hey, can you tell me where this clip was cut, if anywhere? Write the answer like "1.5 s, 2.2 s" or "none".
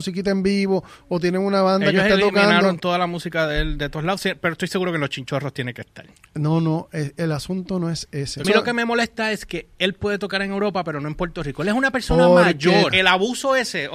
8.4 s, 12.9 s